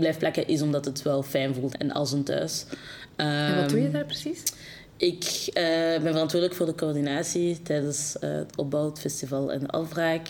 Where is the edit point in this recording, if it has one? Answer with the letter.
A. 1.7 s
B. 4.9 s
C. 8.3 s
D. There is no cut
A